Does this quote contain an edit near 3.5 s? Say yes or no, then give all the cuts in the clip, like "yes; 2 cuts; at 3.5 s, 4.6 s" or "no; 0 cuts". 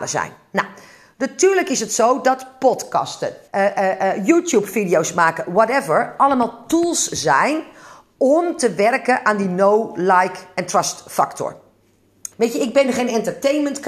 yes; 2 cuts; at 3.5 s, 12.3 s